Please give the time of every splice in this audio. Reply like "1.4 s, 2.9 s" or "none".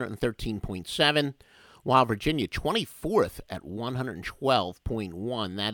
none